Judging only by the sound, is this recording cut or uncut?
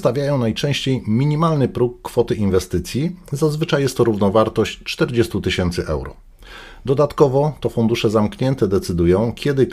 uncut